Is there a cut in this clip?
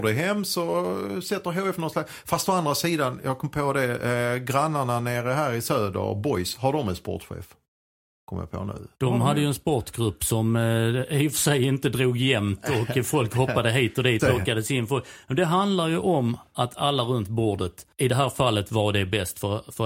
yes; 2 cuts; at 14.2 s, 17.9 s

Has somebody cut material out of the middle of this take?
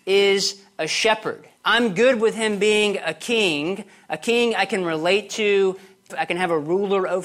yes; 2 cuts; at 1.6 s, 6.1 s

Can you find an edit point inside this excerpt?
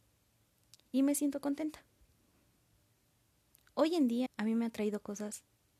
yes; 1 cut; at 4.3 s

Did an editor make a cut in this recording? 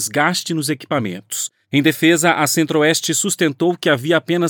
yes; 1 cut; at 1.6 s

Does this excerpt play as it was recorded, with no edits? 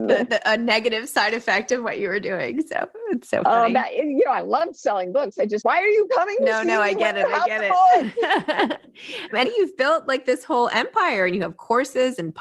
no; 2 cuts; at 5.6 s, 9.4 s

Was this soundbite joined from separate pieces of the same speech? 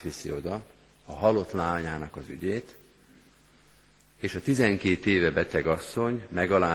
no; 0 cuts

